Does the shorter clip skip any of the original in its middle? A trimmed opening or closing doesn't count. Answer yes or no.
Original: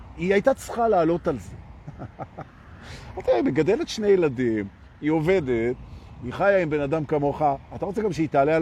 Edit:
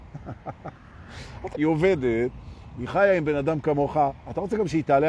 yes